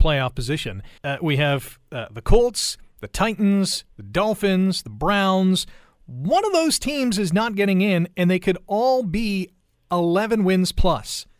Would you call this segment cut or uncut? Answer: cut